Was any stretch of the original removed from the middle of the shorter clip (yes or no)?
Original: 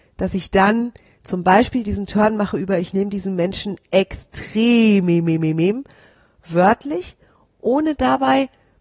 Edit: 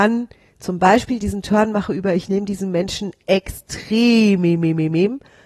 no